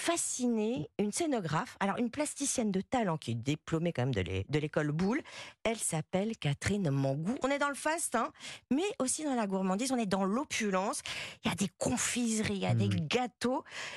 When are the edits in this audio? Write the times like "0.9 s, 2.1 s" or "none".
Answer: 7.4 s